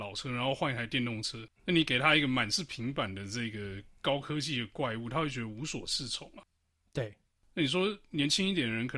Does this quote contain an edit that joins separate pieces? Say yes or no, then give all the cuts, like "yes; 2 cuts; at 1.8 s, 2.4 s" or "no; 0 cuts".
yes; 1 cut; at 1.6 s